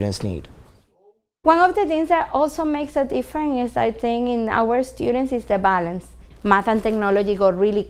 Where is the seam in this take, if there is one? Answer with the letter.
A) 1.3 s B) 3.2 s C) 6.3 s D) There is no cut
C